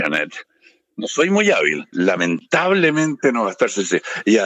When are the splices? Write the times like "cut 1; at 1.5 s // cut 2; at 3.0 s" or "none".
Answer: cut 1; at 1.9 s